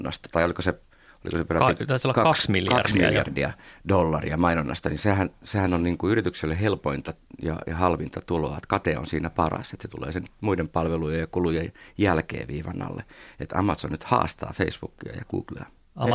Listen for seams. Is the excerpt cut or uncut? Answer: uncut